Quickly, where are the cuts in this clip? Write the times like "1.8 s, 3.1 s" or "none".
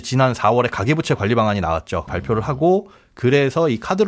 2.1 s